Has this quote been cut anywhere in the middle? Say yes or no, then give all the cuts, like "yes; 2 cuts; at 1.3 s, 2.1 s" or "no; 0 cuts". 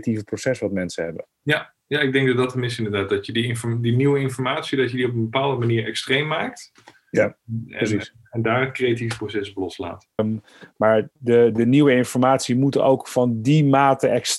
yes; 1 cut; at 10.2 s